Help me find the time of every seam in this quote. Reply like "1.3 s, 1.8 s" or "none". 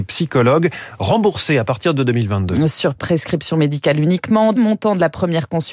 4.6 s